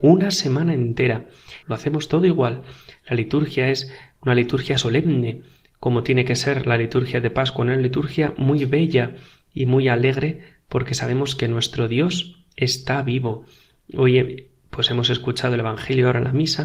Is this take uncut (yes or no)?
no